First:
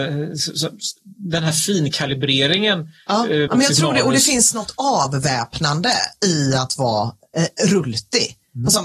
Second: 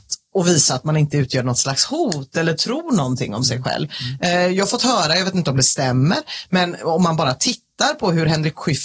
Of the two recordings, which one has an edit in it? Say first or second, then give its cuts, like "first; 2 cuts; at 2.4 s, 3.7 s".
first; 1 cut; at 3.5 s